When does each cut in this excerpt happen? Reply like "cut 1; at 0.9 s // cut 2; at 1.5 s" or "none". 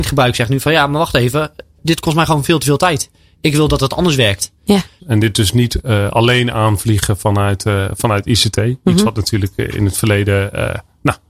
cut 1; at 5.0 s